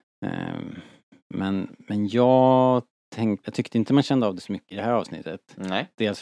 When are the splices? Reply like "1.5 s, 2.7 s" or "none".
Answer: 3.4 s, 4.7 s